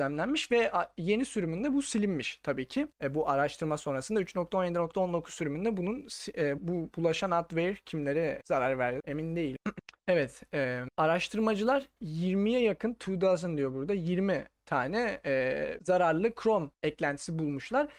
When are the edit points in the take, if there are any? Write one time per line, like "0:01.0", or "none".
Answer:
0:06.6
0:09.8

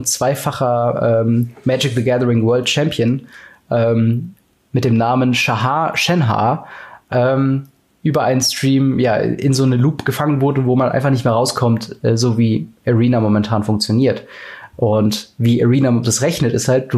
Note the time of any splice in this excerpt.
0:14.7
0:16.0

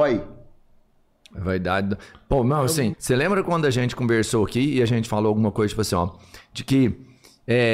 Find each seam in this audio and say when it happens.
0:02.9

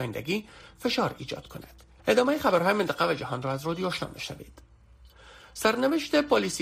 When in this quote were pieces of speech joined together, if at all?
0:02.0

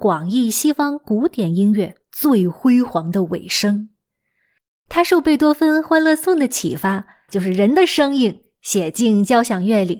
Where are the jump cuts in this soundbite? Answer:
0:07.3

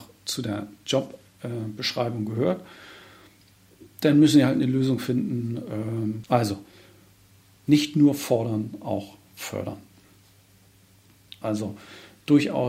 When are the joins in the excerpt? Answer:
0:06.2
0:11.4

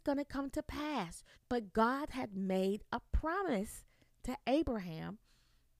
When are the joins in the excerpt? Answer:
0:01.3

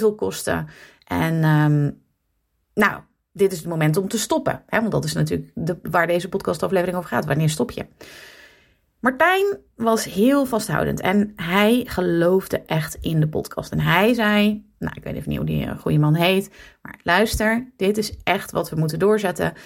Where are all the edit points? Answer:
none

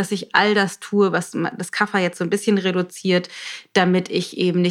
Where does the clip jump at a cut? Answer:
none

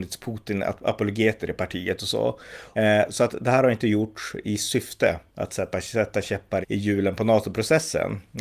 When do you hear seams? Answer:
0:02.7
0:06.6

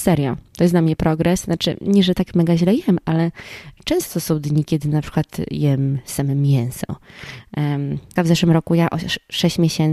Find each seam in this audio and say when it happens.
0:08.2

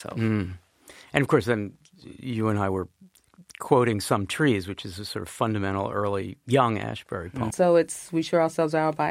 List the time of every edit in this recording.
0:07.5

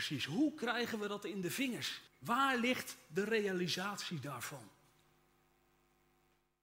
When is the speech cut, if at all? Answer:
0:02.1

